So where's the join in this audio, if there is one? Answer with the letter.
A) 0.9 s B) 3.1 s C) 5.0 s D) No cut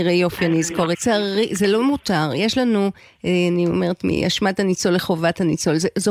A